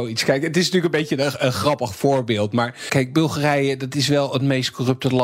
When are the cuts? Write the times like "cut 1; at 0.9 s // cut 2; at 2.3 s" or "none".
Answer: cut 1; at 2.9 s